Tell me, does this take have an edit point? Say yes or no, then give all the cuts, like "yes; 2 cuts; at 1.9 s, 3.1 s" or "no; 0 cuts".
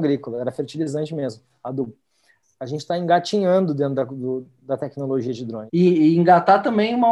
yes; 3 cuts; at 2.4 s, 4.6 s, 5.7 s